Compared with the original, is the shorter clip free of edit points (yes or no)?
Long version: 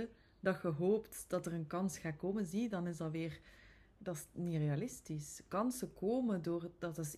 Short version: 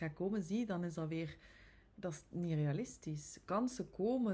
yes